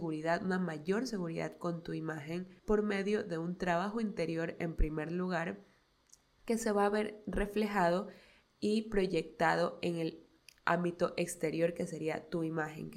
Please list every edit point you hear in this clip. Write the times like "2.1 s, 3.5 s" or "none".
2.6 s